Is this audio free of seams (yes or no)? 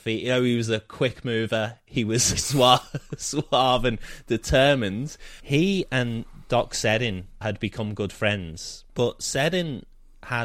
no